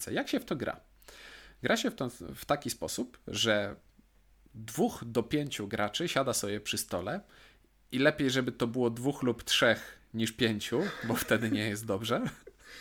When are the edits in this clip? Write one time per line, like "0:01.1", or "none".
none